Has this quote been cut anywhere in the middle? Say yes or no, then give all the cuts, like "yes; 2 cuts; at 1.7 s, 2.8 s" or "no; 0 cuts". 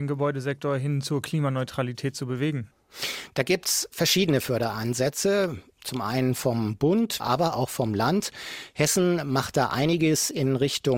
yes; 1 cut; at 7.2 s